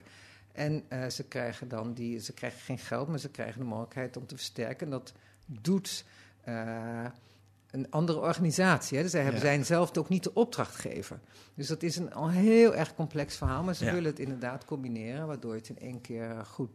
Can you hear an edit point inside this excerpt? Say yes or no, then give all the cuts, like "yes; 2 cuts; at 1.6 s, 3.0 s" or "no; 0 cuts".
no; 0 cuts